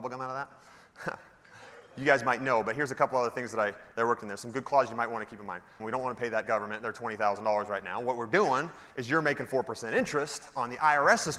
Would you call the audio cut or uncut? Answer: cut